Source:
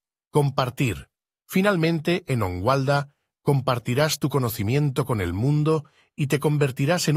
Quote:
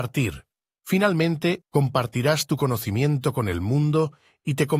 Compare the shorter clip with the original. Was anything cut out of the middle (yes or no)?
yes